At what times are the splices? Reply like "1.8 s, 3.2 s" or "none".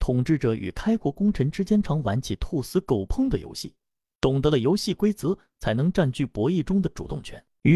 1.8 s